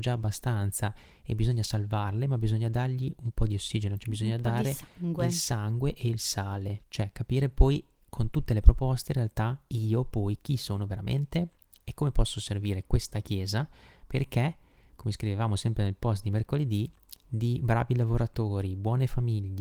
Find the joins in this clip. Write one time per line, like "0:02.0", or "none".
0:06.8